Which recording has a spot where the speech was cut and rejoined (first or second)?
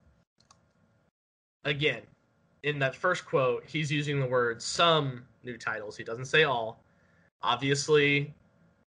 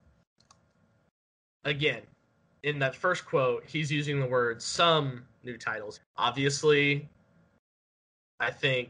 second